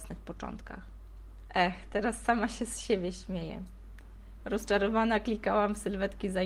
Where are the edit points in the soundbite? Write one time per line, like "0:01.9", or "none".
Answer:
0:01.5
0:04.4